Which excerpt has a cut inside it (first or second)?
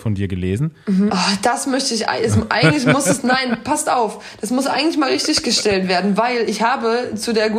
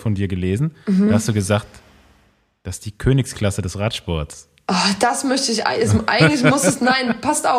first